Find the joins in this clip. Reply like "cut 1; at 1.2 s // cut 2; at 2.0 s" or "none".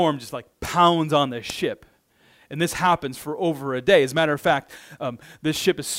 none

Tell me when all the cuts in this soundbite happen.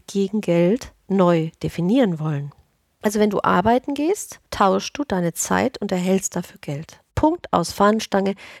cut 1; at 7.1 s

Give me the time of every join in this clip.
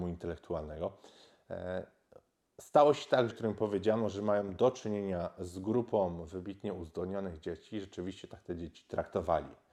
cut 1; at 3.3 s

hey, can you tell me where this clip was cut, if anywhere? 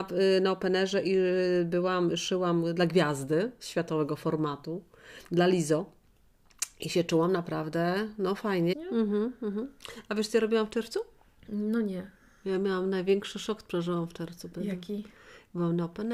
cut 1; at 8.7 s

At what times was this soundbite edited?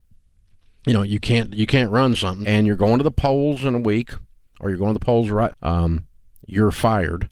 cut 1; at 2.4 s // cut 2; at 5.5 s

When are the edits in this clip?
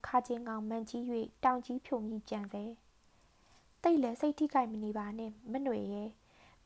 none

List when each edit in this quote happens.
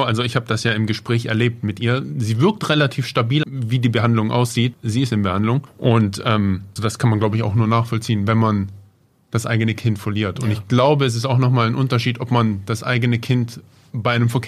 cut 1; at 3.4 s // cut 2; at 5.7 s // cut 3; at 6.8 s

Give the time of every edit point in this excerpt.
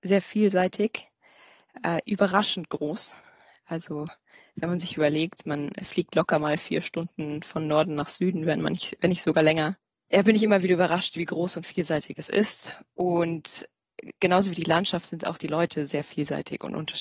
none

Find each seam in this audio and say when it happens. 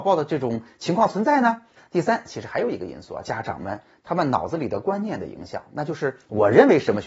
cut 1; at 1.8 s // cut 2; at 3.2 s

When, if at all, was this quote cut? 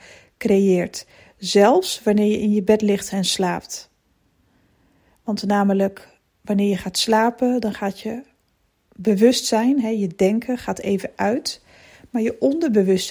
none

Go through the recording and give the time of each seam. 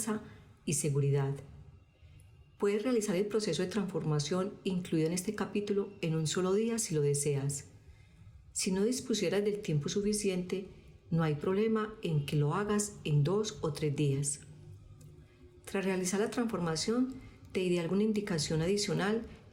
none

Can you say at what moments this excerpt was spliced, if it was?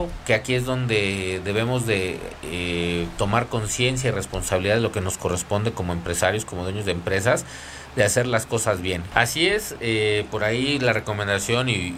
cut 1; at 9.1 s

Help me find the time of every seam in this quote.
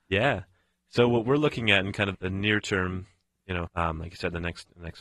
cut 1; at 2.1 s // cut 2; at 3.7 s

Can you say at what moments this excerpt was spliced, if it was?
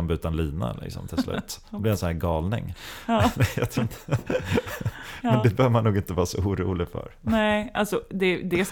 none

